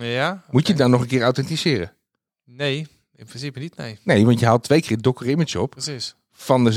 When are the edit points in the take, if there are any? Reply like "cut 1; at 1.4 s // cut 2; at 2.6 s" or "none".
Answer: none